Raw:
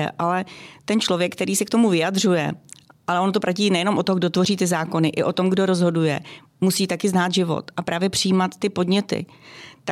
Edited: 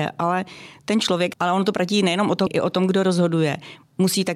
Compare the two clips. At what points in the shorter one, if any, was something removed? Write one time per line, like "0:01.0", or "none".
0:01.3
0:02.5